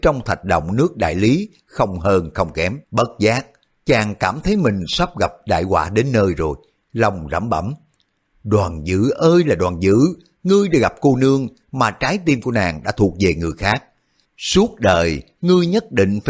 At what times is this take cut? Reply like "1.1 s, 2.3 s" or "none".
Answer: 2.8 s